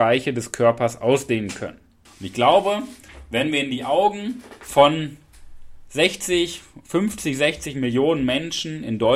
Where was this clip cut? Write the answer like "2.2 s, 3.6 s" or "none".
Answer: 2.0 s